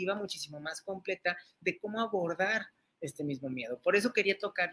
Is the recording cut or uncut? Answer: uncut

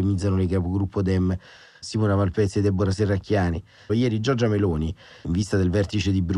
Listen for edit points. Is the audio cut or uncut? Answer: cut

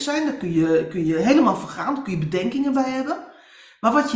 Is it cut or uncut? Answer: uncut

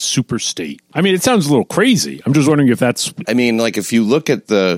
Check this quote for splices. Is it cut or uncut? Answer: cut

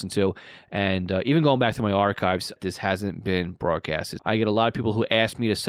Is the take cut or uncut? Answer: cut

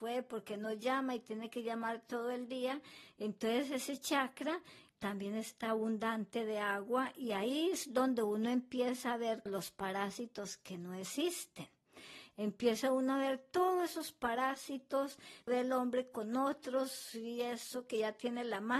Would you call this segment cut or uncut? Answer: cut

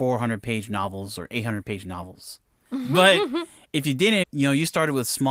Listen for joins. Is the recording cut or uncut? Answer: cut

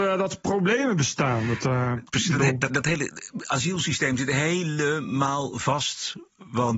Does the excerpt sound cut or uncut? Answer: cut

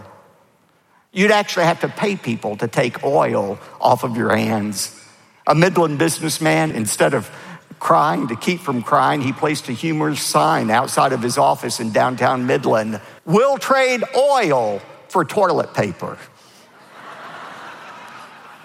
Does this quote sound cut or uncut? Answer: cut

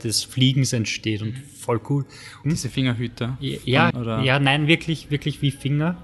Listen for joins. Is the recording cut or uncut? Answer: cut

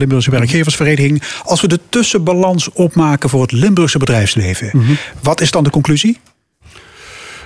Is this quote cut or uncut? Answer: uncut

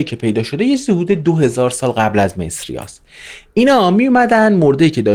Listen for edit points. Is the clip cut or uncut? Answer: uncut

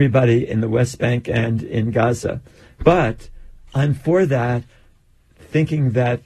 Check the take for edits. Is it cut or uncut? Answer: uncut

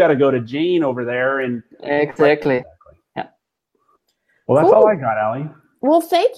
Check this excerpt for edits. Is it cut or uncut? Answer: cut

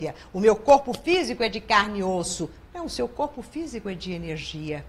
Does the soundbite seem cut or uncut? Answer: uncut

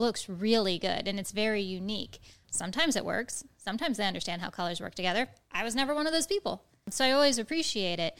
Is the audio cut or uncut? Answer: cut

